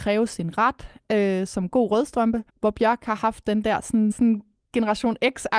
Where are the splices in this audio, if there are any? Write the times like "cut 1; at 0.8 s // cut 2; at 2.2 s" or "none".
cut 1; at 2.5 s // cut 2; at 4.1 s

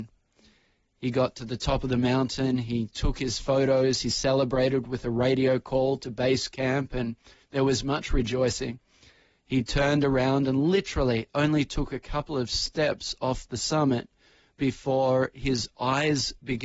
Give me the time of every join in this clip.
none

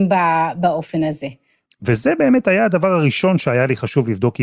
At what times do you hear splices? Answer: cut 1; at 1.7 s

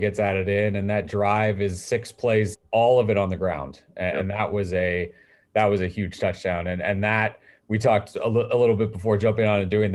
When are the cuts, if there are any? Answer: cut 1; at 2.5 s

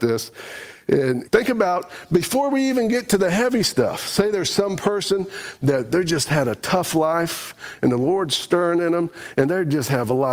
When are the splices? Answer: cut 1; at 1.3 s

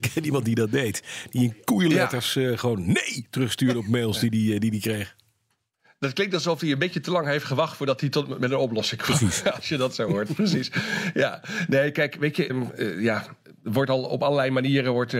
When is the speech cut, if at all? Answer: cut 1; at 12.5 s

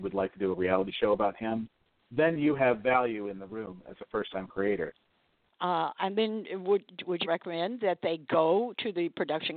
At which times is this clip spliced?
cut 1; at 5.5 s // cut 2; at 7.2 s

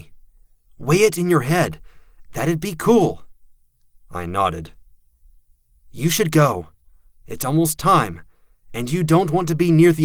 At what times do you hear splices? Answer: cut 1; at 2.2 s

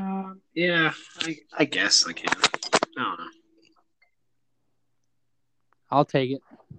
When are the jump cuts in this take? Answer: none

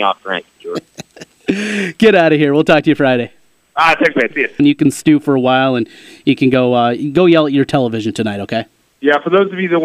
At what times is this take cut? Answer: cut 1; at 4.6 s

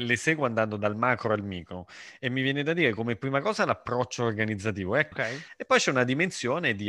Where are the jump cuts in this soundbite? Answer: cut 1; at 5.1 s

